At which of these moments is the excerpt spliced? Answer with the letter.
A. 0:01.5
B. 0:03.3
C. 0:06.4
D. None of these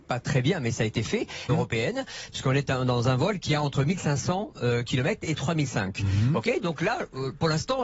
A